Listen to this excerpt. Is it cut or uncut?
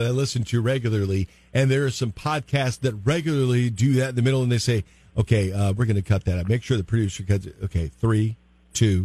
uncut